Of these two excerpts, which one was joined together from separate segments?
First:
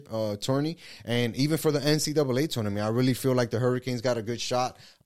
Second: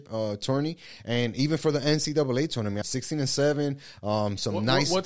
second; 1 cut; at 2.8 s

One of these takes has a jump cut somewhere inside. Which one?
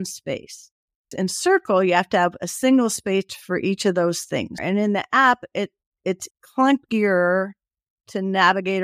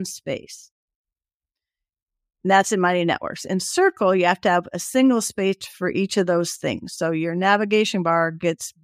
first; 3 cuts; at 1.1 s, 4.6 s, 6.3 s

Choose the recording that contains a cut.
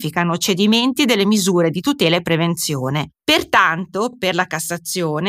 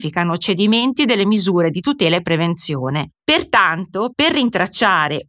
second; 1 cut; at 4.1 s

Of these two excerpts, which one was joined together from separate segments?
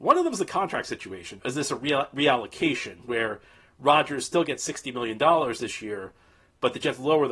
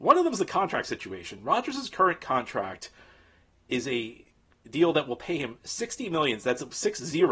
first; 1 cut; at 1.4 s

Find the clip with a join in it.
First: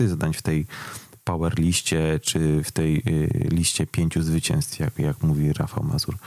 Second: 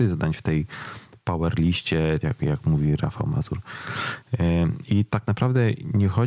second; 1 cut; at 2.2 s

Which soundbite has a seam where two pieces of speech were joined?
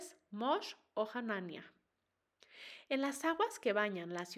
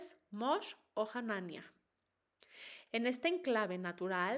second; 1 cut; at 2.9 s

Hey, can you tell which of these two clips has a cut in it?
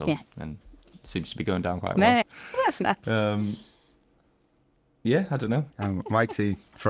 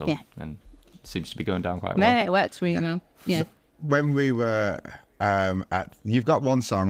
first; 2 cuts; at 2.2 s, 5.7 s

